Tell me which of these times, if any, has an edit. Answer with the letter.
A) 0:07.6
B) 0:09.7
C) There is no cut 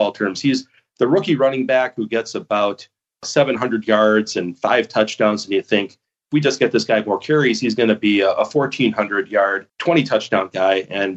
B